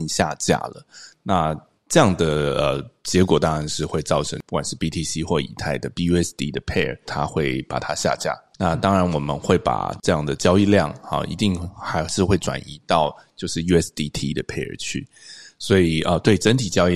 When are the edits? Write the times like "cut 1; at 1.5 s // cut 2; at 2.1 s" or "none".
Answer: cut 1; at 7.0 s // cut 2; at 8.5 s